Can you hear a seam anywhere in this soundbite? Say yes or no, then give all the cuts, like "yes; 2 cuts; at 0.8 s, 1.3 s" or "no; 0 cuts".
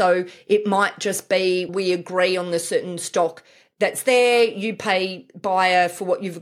yes; 1 cut; at 1.7 s